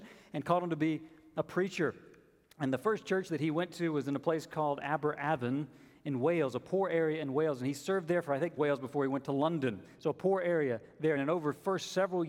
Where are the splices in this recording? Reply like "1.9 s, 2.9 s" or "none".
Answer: 8.6 s, 11.2 s